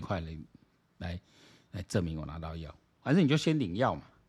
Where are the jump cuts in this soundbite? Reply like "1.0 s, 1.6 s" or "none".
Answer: none